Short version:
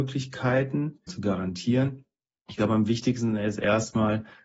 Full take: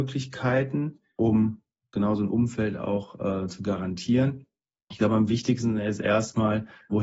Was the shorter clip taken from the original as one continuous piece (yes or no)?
no